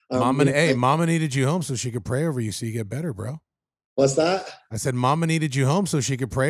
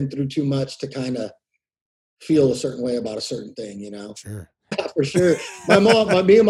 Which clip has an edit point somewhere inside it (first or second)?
second